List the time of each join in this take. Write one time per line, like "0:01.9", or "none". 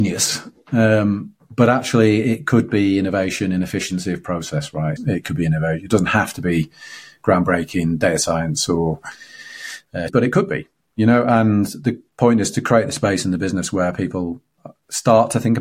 0:05.0
0:10.1